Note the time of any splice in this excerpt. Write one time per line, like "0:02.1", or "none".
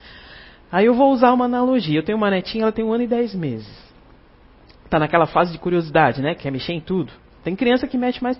none